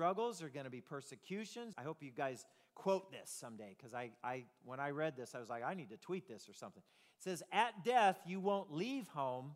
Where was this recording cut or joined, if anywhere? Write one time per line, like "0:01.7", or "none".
0:01.7